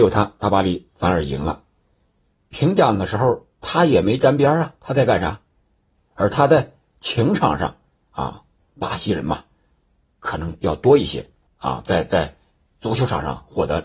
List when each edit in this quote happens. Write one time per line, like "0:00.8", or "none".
0:05.9
0:08.6
0:11.5